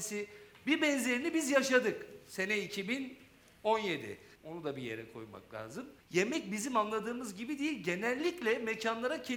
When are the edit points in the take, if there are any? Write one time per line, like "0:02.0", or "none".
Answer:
0:04.4
0:06.0